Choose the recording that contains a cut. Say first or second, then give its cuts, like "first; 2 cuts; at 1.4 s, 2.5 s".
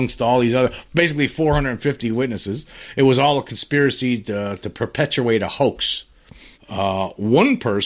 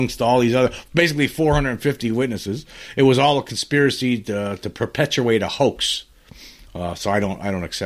first; 1 cut; at 6.5 s